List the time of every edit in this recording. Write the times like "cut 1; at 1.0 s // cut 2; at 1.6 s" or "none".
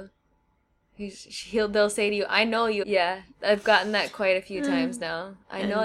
cut 1; at 2.8 s